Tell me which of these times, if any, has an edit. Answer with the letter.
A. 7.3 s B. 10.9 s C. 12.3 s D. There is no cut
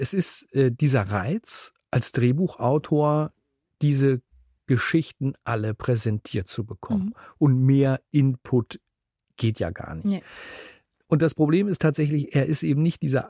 D